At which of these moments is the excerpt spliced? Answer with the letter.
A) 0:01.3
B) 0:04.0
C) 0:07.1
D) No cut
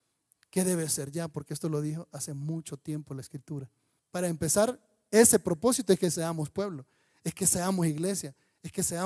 B